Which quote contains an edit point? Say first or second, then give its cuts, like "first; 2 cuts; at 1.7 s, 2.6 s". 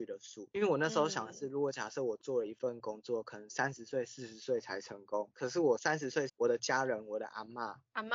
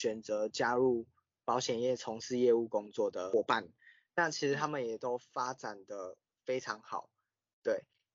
first; 1 cut; at 6.3 s